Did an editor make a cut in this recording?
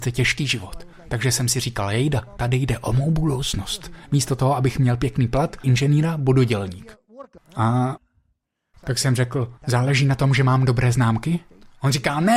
yes; 3 cuts; at 5.6 s, 7.4 s, 9.6 s

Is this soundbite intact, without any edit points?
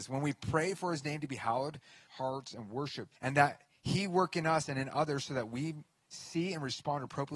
no; 2 cuts; at 2.1 s, 3.2 s

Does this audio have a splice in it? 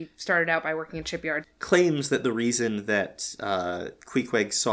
yes; 1 cut; at 1.4 s

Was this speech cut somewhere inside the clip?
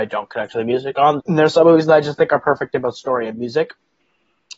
yes; 1 cut; at 1.2 s

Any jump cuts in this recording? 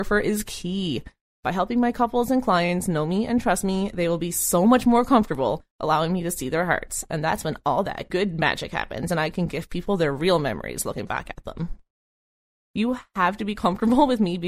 yes; 2 cuts; at 8.1 s, 12.6 s

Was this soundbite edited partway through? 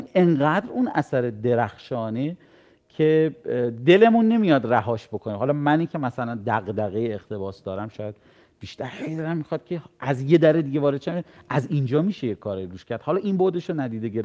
no; 0 cuts

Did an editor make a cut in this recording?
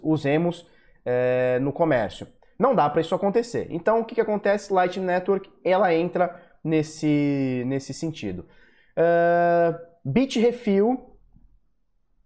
no; 0 cuts

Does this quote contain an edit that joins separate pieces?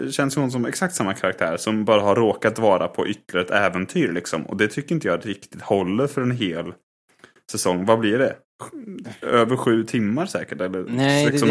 no; 0 cuts

